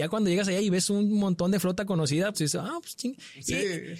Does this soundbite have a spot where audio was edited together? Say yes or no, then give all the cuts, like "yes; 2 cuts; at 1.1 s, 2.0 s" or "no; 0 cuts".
yes; 1 cut; at 2.3 s